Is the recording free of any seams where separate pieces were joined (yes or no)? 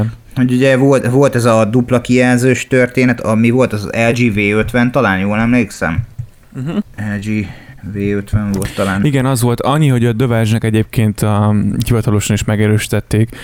no